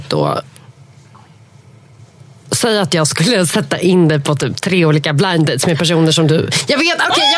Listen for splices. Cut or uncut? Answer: uncut